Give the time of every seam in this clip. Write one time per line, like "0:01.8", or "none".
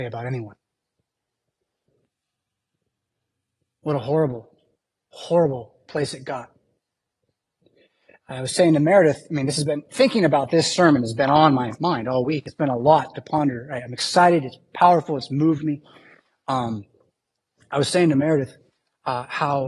none